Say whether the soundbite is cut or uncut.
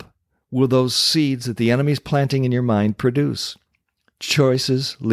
uncut